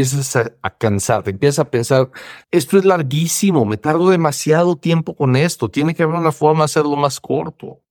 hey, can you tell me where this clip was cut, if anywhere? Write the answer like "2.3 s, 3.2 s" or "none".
none

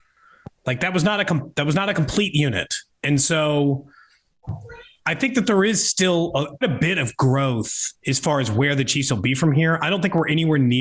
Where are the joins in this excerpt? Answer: 6.6 s

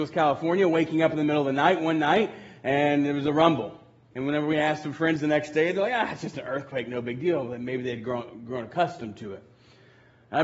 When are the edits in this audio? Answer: 4.1 s

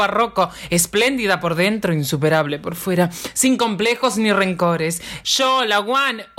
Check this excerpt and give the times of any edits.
5.2 s

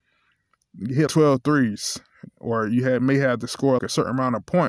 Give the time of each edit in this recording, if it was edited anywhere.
1.1 s, 2.3 s, 3.8 s

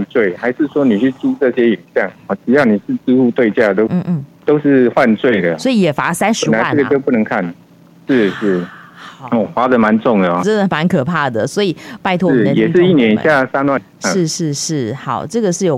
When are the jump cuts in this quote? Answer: 3.9 s, 10.4 s, 13.8 s

